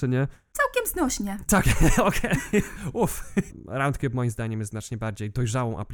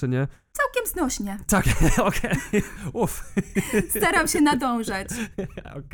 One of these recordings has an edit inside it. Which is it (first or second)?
first